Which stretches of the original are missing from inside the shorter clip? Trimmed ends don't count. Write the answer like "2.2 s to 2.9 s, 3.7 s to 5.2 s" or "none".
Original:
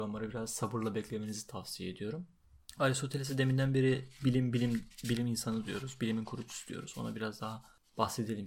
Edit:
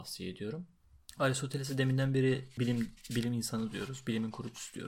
4.2 s to 4.5 s